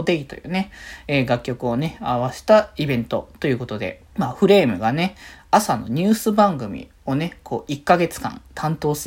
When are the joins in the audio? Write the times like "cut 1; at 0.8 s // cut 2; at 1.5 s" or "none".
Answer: cut 1; at 4.1 s

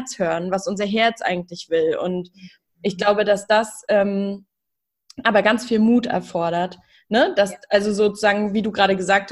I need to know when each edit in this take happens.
none

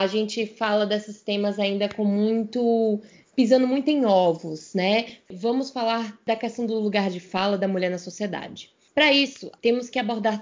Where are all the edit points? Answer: cut 1; at 5.3 s

